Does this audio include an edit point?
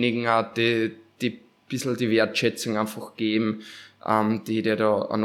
no; 0 cuts

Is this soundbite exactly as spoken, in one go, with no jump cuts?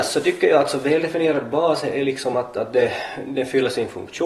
yes; 0 cuts

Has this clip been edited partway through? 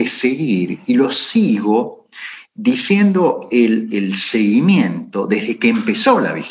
no; 0 cuts

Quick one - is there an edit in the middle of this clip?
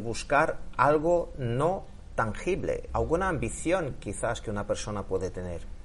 yes; 1 cut; at 2.9 s

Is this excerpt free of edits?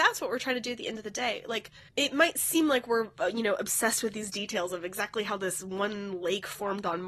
no; 1 cut; at 1.9 s

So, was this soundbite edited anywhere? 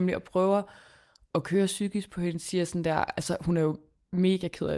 no; 0 cuts

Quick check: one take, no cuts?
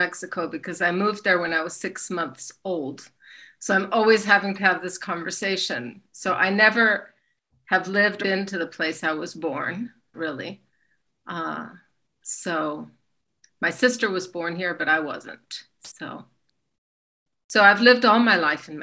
no; 2 cuts; at 8.2 s, 10.1 s

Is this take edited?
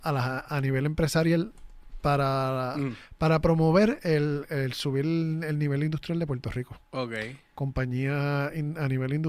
no; 0 cuts

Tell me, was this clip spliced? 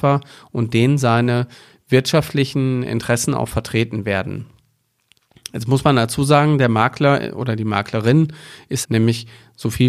yes; 1 cut; at 8.8 s

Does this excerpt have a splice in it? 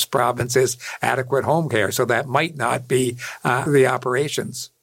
yes; 1 cut; at 3.7 s

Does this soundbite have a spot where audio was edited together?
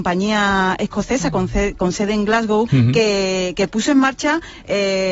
yes; 1 cut; at 2.7 s

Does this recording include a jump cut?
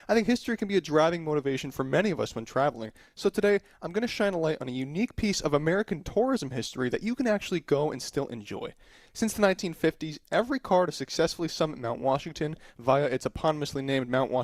no; 0 cuts

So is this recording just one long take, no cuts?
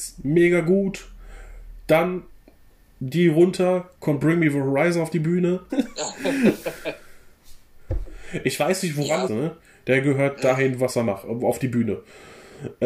no; 2 cuts; at 5.7 s, 9.3 s

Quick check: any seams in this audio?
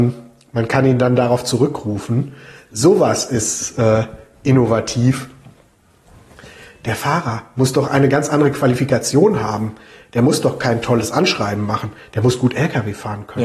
no; 0 cuts

